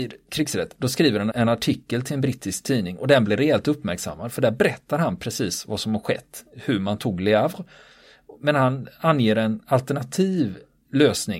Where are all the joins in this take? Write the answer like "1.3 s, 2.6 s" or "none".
1.3 s